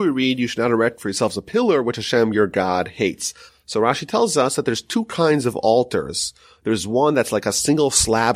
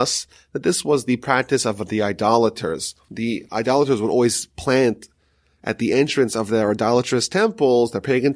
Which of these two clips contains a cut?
first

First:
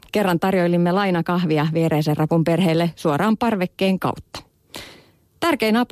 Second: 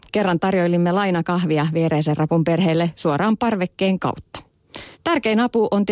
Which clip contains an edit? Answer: second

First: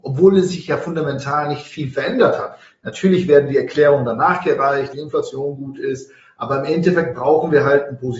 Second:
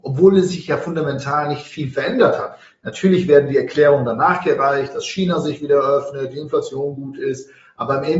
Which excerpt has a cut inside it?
first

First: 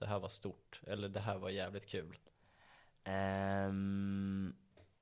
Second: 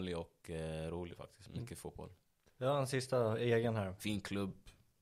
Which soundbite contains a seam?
second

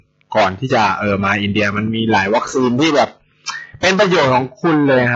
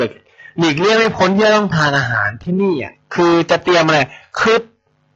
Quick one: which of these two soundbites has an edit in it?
second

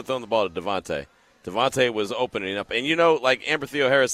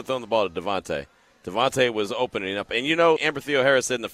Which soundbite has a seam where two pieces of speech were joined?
second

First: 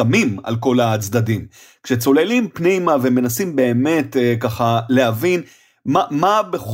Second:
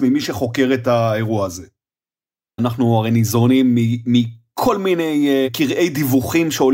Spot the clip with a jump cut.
second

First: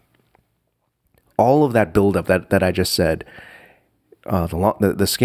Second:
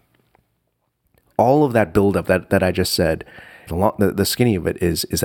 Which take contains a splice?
second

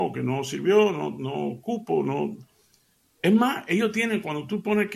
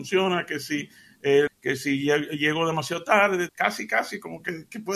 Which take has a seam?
second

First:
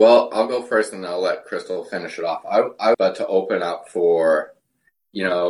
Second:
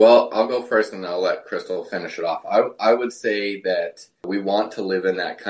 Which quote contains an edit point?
first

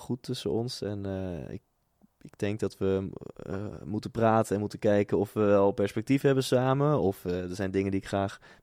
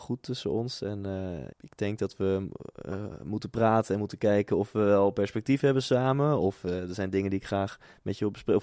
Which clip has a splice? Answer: second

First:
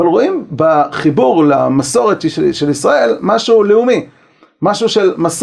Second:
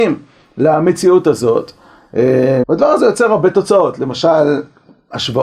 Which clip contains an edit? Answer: second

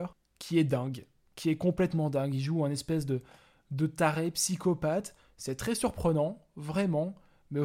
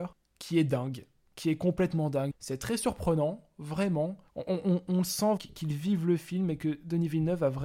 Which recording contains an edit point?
second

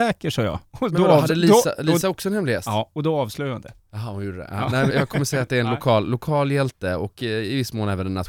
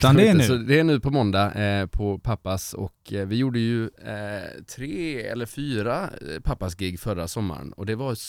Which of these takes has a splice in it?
first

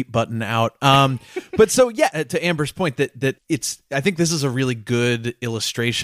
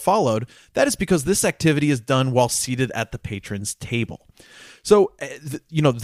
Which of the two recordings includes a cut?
first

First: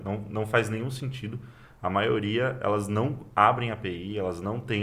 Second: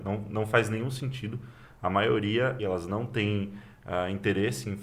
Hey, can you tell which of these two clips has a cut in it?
second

